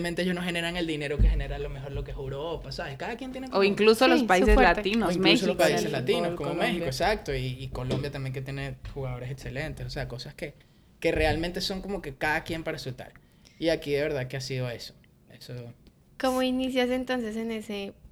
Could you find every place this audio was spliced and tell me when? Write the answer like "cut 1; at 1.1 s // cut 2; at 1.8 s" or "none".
none